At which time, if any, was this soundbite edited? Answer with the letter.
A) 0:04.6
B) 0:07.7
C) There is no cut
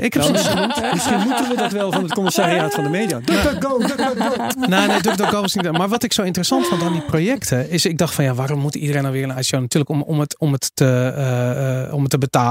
C